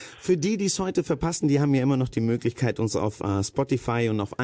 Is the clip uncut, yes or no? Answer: yes